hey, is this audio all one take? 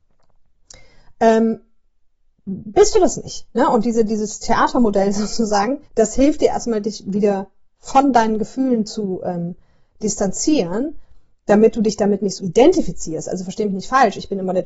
no; 2 cuts; at 5.8 s, 12.4 s

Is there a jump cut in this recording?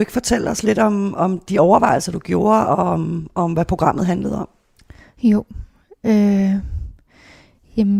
no; 0 cuts

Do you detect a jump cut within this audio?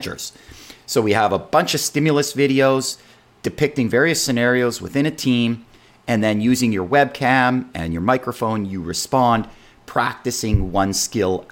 no; 0 cuts

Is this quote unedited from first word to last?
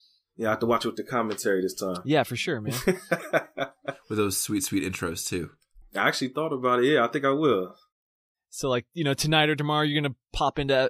no; 1 cut; at 5.8 s

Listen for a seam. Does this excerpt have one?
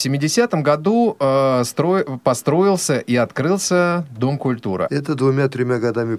yes; 1 cut; at 4.9 s

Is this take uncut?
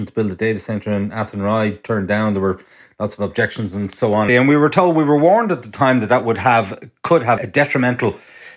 no; 2 cuts; at 4.3 s, 7.4 s

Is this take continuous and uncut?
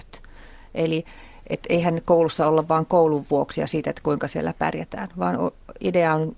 yes; 0 cuts

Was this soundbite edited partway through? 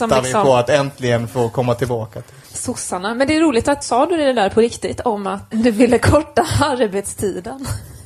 yes; 3 cuts; at 2.4 s, 3.8 s, 5.5 s

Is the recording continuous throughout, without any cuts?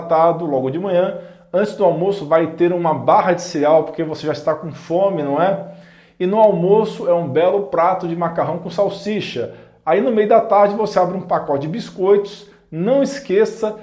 yes; 0 cuts

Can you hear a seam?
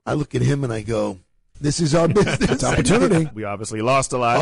yes; 2 cuts; at 1.5 s, 3.3 s

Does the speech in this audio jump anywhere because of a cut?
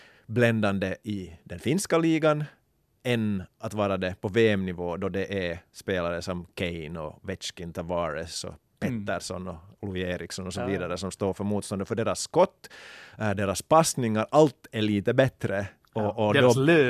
no; 0 cuts

